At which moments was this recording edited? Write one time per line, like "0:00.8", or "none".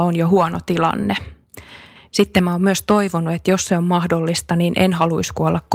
0:02.0